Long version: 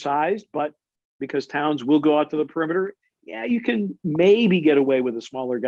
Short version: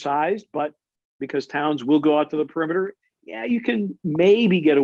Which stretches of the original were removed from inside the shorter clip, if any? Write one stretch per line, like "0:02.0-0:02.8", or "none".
none

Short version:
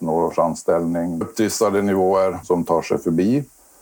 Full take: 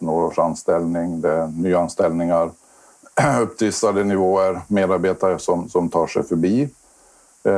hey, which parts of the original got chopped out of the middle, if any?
0:01.2-0:03.4
0:04.6-0:05.7

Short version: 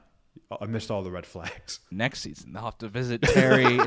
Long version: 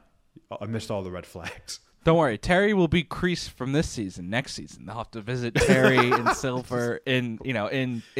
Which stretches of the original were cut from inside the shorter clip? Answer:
0:01.9-0:04.2

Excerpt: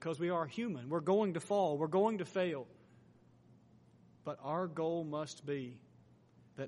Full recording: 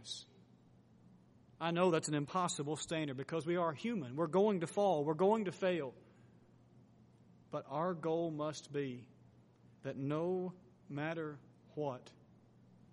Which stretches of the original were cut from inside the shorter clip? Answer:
none

